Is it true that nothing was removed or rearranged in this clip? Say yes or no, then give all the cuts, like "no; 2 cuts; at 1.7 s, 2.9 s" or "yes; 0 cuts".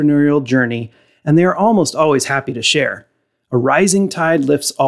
yes; 0 cuts